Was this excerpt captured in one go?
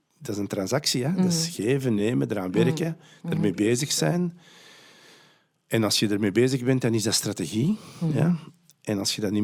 yes; 0 cuts

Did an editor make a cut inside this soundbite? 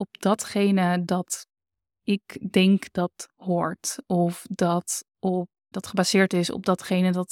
yes; 1 cut; at 5.7 s

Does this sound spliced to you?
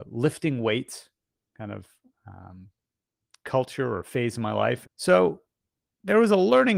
yes; 1 cut; at 4.8 s

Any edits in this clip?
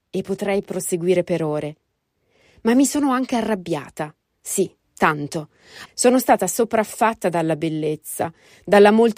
yes; 1 cut; at 5.9 s

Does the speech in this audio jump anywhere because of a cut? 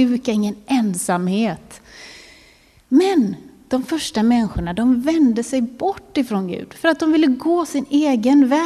no; 0 cuts

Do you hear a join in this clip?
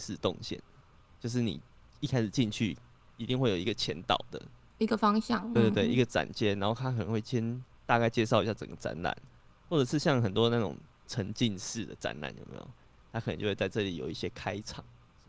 yes; 1 cut; at 5.6 s

